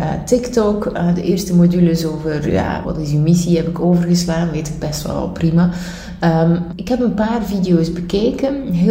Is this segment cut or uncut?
cut